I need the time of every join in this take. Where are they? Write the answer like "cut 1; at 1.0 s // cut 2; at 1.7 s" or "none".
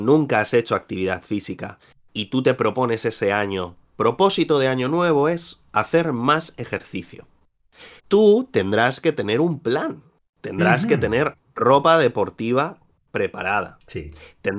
cut 1; at 8.0 s